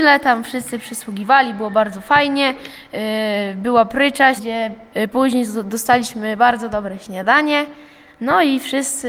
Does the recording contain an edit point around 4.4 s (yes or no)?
yes